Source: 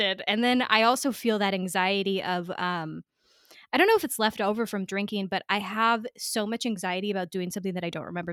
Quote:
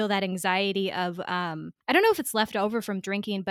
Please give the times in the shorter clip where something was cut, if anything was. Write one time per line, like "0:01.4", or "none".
0:01.8